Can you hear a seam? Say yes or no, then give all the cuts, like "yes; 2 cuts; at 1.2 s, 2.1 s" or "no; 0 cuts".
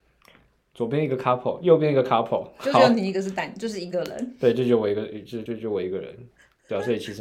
yes; 1 cut; at 5.5 s